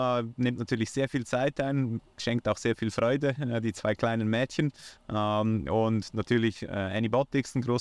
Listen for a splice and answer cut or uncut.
uncut